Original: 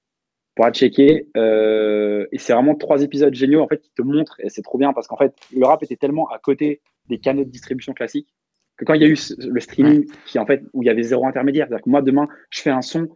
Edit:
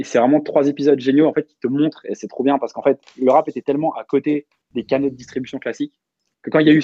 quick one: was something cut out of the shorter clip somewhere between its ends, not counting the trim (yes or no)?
no